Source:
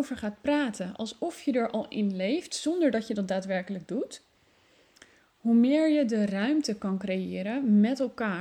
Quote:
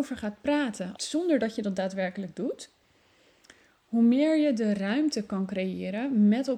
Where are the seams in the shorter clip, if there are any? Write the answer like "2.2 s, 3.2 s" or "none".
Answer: 1.0 s